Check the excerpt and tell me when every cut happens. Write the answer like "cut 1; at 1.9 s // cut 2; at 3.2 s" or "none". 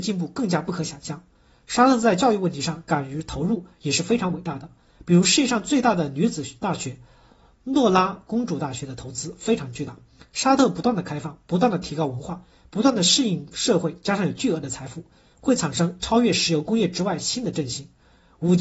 none